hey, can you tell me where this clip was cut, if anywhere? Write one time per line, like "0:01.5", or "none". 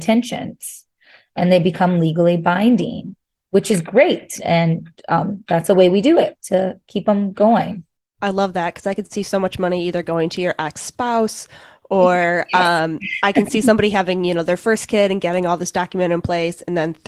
0:04.4